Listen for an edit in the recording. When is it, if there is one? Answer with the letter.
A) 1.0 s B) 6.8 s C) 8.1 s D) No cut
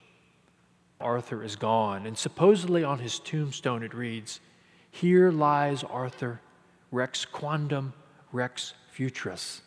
A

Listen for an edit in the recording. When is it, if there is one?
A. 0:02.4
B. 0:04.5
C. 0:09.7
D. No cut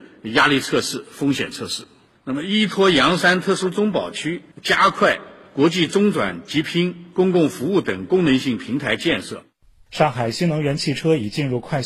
B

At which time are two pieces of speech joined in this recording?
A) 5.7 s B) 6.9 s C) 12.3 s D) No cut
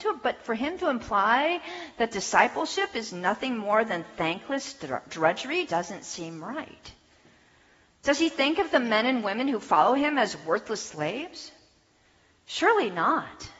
A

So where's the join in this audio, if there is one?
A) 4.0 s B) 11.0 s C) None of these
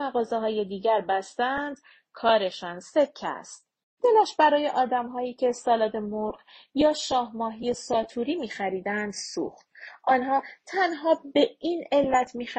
A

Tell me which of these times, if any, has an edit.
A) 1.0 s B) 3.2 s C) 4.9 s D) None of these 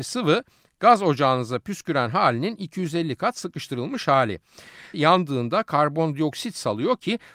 C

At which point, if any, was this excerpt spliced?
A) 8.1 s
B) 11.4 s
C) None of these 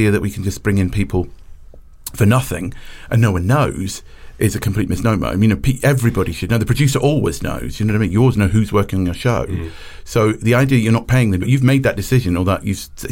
B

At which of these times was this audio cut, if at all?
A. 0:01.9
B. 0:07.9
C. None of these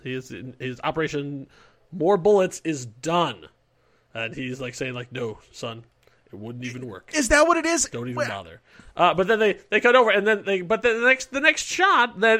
C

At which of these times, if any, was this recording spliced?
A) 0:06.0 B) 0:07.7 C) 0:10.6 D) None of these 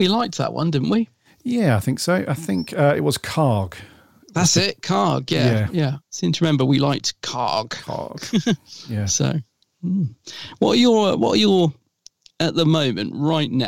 A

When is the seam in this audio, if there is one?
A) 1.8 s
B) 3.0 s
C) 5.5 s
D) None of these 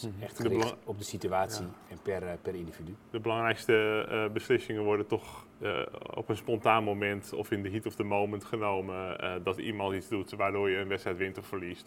C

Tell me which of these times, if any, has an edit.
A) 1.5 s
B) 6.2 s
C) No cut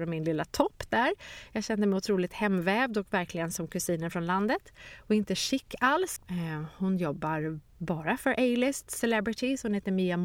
B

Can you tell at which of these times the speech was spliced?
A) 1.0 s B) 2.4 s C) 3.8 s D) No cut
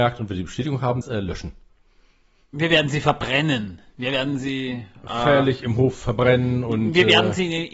A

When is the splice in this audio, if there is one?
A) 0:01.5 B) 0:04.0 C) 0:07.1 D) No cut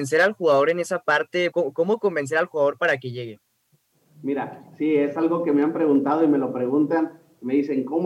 A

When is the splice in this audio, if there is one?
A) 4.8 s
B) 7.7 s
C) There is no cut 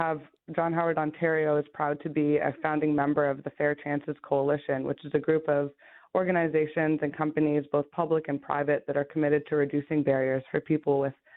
C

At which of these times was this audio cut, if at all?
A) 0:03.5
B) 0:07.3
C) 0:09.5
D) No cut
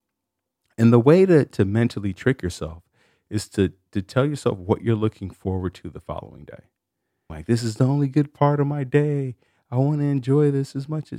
B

